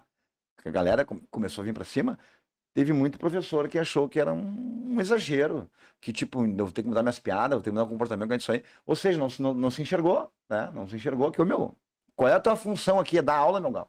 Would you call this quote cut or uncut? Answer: uncut